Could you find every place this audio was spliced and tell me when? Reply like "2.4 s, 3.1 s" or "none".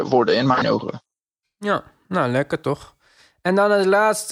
none